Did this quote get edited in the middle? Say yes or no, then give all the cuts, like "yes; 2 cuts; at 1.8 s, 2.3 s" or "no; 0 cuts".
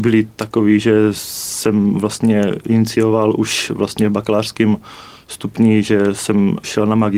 no; 0 cuts